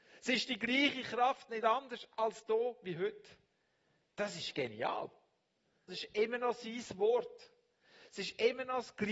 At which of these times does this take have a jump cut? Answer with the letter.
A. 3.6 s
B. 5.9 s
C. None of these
B